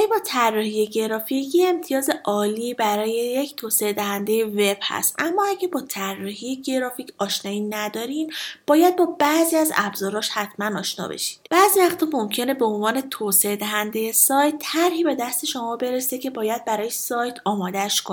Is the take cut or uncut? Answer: cut